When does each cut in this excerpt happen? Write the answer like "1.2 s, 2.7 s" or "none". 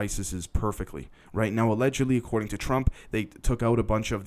none